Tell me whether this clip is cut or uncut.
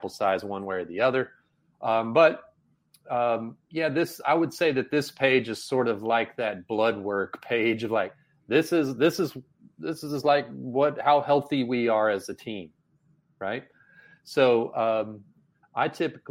uncut